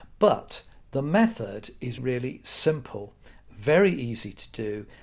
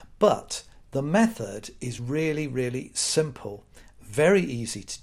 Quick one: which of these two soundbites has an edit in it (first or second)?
first